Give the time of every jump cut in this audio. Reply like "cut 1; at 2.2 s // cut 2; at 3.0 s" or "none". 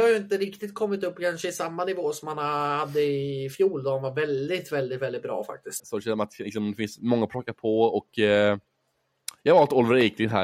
cut 1; at 5.8 s